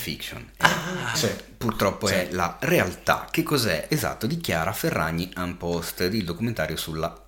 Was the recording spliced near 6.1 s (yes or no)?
no